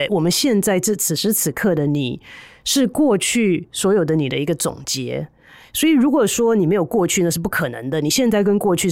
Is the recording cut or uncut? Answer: uncut